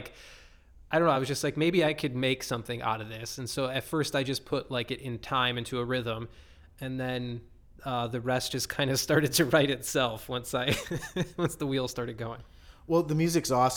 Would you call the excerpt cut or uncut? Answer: uncut